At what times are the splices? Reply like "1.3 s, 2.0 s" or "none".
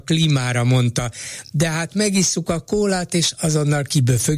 none